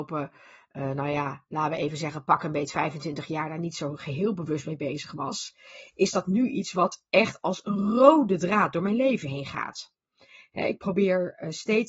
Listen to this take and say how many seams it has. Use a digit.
0